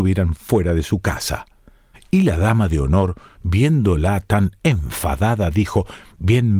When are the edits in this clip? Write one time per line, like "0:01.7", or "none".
0:01.9